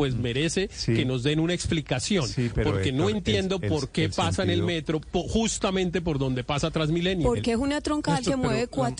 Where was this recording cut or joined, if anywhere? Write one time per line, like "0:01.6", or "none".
none